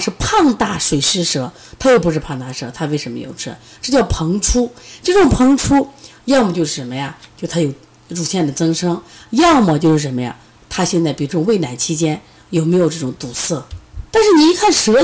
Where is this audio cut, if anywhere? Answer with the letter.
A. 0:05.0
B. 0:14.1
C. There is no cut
B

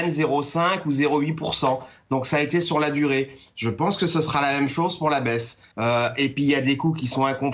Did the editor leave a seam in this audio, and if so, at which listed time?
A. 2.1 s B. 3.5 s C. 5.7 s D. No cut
C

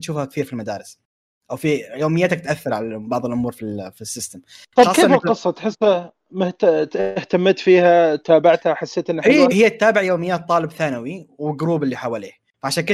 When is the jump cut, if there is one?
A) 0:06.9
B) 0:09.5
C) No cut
B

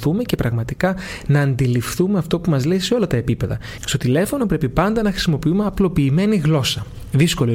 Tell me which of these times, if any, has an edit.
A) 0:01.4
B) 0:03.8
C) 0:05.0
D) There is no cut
B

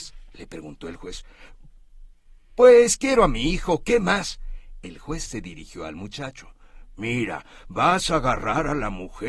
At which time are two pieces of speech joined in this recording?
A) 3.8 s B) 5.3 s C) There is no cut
B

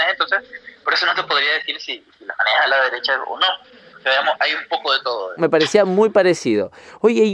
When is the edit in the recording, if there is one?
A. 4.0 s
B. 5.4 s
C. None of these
B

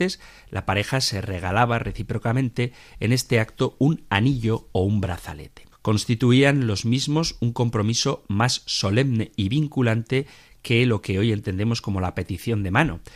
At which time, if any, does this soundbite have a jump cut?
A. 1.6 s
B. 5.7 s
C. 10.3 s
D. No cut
B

